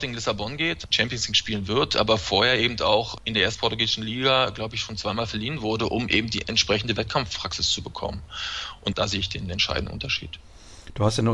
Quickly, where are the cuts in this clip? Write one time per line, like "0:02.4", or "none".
none